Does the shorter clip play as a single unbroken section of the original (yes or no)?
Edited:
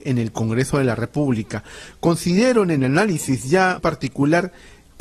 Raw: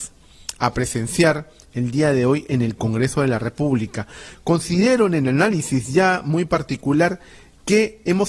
no